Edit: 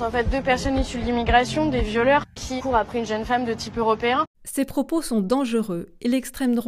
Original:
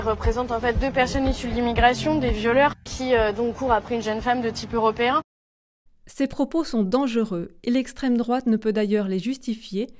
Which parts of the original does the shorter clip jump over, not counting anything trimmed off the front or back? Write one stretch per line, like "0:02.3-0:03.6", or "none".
0:03.1-0:03.5
0:05.3-0:06.0